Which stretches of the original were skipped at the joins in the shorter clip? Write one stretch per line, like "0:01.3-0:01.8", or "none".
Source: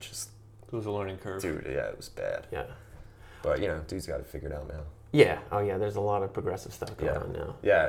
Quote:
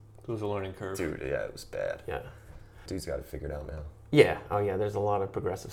0:03.3-0:03.9